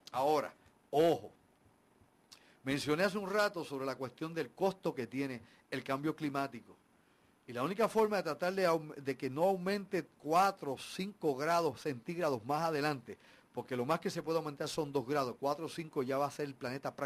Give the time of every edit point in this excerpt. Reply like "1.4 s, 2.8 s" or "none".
none